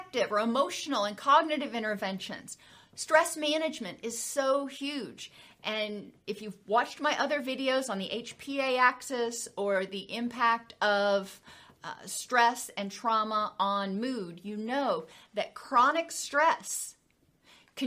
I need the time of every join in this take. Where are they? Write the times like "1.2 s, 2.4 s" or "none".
none